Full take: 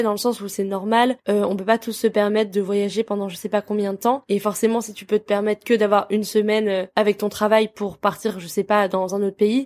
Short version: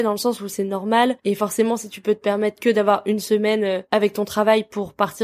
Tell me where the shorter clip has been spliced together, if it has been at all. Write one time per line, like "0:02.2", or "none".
0:01.2